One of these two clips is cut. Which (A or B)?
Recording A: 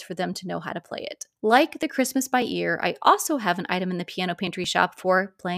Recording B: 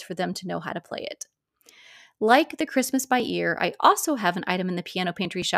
A